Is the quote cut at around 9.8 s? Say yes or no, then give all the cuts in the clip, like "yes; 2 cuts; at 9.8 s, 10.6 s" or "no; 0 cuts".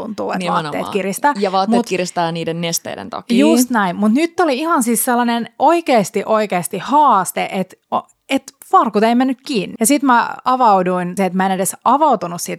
yes; 2 cuts; at 9.8 s, 11.2 s